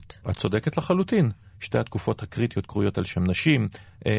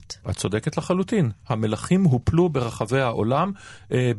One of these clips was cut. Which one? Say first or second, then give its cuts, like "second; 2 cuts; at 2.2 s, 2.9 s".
first; 1 cut; at 1.4 s